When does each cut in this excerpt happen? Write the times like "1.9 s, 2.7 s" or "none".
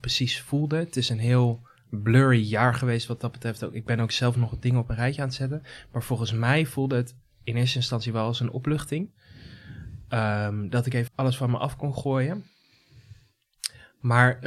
11.1 s